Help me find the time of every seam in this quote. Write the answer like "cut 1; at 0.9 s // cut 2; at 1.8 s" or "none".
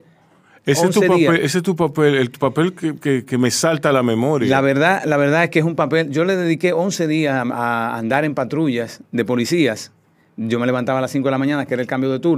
none